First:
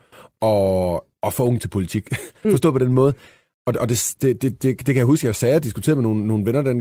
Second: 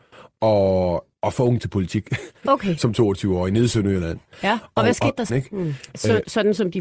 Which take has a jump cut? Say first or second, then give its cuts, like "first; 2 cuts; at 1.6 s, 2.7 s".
second; 2 cuts; at 2.4 s, 5.3 s